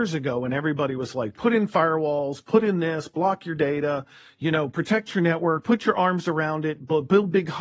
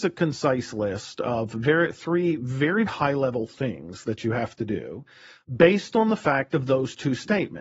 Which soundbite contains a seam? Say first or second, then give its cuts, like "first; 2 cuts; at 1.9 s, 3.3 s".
second; 1 cut; at 2.9 s